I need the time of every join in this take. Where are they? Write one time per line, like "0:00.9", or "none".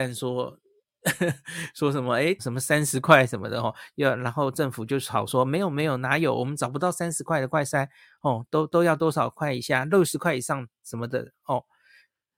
0:02.4